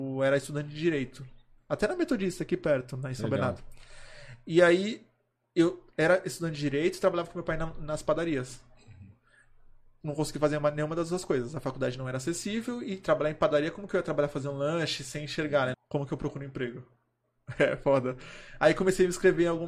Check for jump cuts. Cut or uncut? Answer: cut